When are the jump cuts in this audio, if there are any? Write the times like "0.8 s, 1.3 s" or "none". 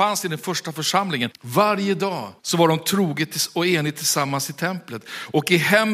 1.3 s, 2.4 s